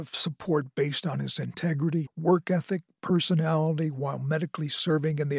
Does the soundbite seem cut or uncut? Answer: cut